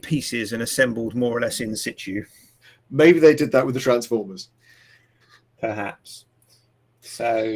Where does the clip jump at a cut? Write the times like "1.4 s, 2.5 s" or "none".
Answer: 5.2 s